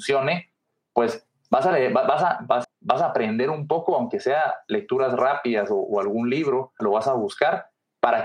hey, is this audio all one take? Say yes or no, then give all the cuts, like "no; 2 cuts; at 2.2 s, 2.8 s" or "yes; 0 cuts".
no; 2 cuts; at 2.6 s, 6.8 s